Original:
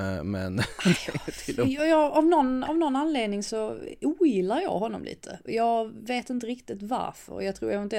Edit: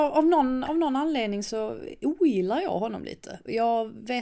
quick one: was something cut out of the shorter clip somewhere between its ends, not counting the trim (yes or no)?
no